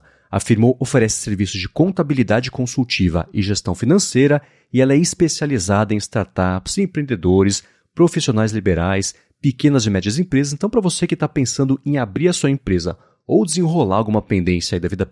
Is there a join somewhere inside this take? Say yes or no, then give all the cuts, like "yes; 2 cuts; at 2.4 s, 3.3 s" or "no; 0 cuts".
no; 0 cuts